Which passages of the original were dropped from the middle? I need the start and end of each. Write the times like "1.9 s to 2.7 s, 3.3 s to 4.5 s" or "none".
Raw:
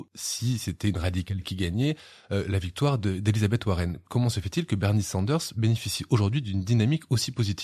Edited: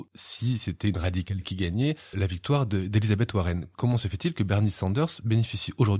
2.1 s to 2.5 s